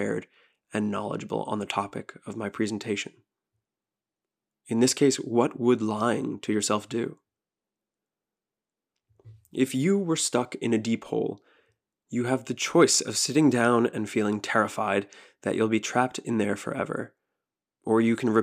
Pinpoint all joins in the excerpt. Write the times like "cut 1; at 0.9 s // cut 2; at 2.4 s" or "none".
none